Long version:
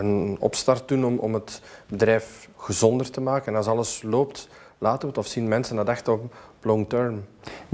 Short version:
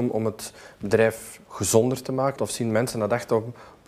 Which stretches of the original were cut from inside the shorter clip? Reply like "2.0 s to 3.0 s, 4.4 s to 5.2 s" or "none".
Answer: 3.4 s to 5.1 s